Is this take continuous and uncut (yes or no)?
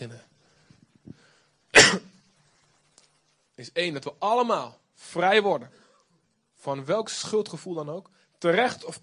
yes